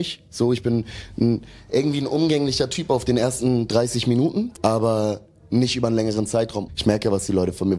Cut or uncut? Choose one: cut